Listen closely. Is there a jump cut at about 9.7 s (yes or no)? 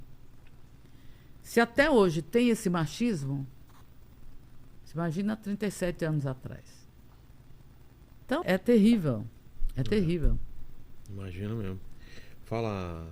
no